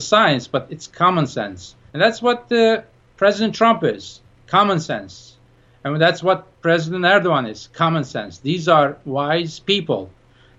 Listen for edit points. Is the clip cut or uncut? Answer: cut